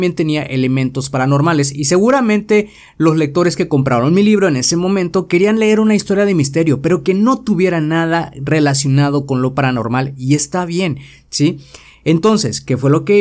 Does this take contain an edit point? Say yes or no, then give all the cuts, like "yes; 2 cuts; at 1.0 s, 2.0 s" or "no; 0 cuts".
no; 0 cuts